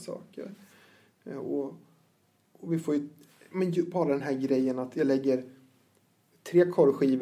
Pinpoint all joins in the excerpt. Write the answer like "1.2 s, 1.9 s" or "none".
none